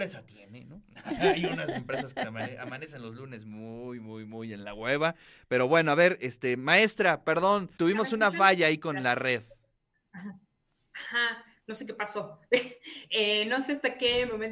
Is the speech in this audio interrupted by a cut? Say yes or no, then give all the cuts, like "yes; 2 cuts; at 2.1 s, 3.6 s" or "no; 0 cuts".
yes; 1 cut; at 7.8 s